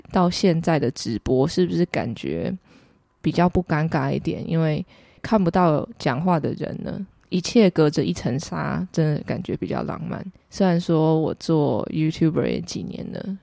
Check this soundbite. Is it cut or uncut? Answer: uncut